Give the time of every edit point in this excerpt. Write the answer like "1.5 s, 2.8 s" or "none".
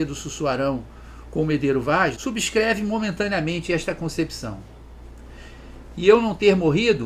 2.2 s, 5.9 s